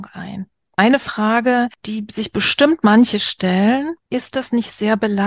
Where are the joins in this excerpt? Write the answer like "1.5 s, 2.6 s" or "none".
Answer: none